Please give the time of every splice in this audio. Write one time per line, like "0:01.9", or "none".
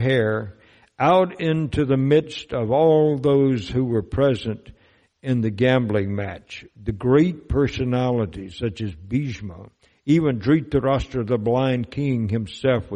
none